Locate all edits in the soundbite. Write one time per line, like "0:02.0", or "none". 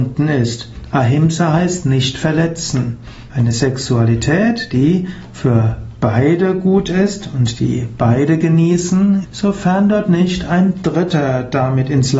0:03.3
0:09.2